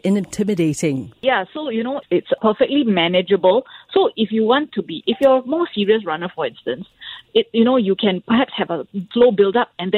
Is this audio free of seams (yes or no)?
no